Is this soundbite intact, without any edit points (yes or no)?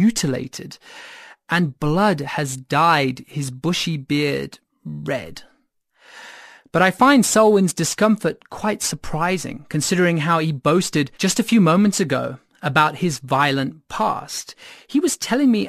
no